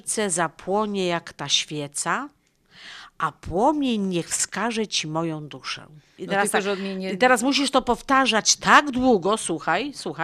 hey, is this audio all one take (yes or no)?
no